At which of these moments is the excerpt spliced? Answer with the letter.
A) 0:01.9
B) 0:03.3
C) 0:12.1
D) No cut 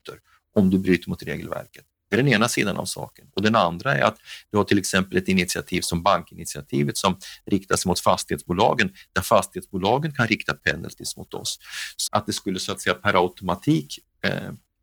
C